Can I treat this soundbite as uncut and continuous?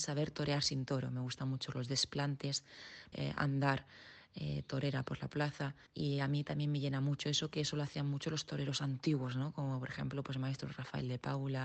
no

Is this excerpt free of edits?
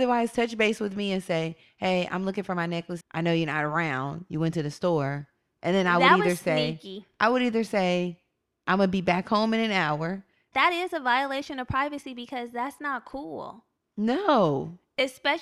no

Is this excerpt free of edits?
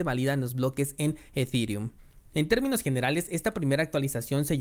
yes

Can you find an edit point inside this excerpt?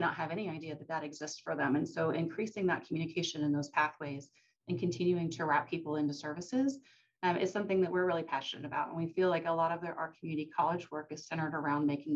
no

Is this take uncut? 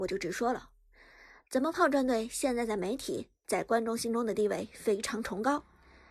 yes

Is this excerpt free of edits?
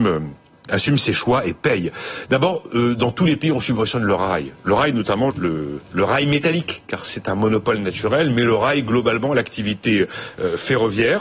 no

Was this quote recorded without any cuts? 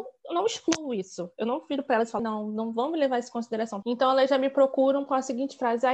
no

